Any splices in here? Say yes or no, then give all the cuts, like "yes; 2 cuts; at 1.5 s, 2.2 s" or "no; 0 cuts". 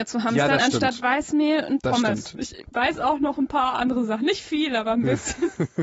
yes; 1 cut; at 2.4 s